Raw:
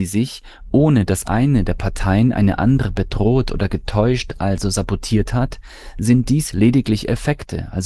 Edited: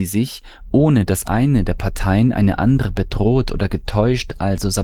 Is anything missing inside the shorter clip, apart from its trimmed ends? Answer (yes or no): no